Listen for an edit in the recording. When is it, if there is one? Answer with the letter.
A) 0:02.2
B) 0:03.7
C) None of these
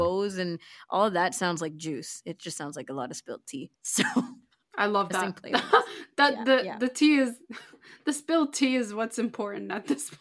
B